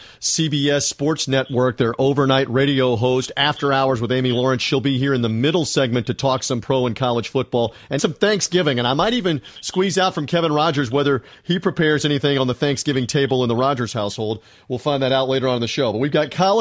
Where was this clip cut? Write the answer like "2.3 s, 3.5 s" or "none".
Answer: 8.0 s